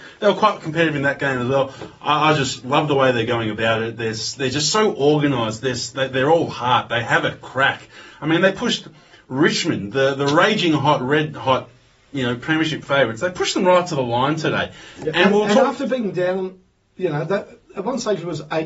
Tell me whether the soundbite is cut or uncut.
uncut